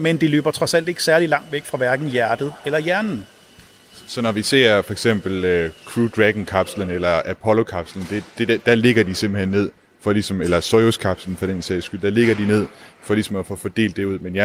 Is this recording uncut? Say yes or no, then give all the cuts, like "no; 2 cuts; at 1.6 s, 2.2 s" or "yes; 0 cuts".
yes; 0 cuts